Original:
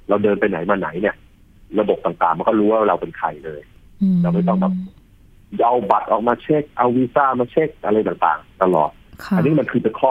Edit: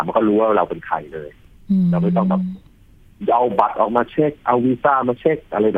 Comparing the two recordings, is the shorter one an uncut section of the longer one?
yes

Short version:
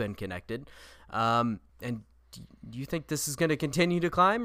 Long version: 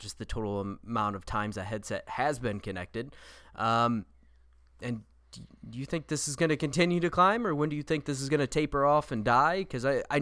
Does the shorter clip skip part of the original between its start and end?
yes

